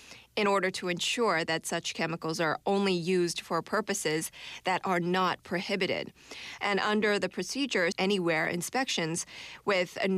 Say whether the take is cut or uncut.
cut